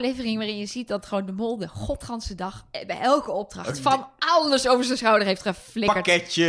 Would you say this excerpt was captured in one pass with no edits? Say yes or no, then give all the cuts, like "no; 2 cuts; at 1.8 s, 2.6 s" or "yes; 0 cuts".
yes; 0 cuts